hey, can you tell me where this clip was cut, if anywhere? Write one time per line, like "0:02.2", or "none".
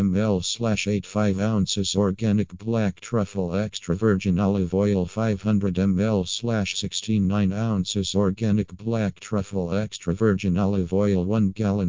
none

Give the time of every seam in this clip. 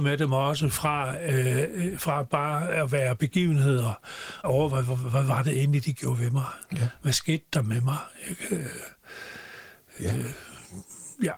0:04.4

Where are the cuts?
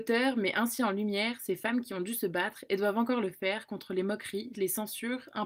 0:04.5

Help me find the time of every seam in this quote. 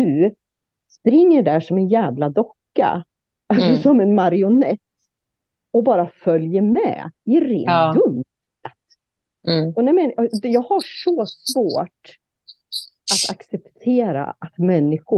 none

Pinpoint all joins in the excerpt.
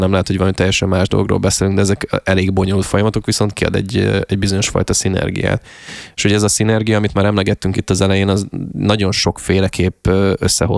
none

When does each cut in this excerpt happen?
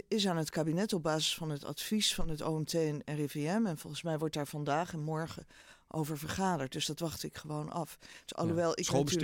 0:08.3

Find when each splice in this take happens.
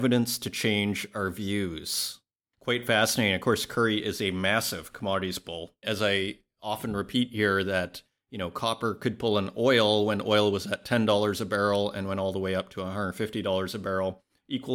0:05.8

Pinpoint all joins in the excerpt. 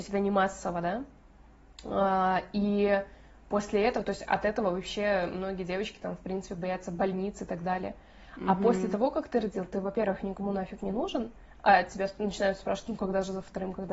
none

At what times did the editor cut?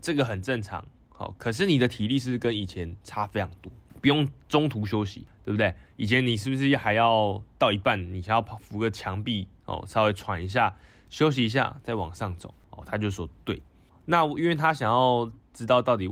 none

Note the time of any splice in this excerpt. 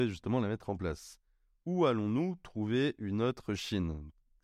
none

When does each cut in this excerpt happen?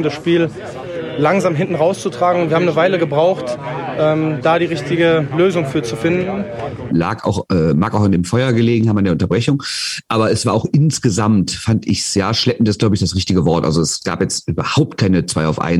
0:06.9

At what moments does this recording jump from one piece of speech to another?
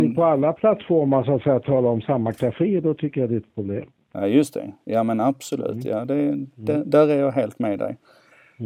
none

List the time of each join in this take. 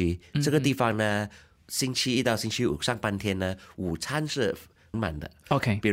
0:04.9

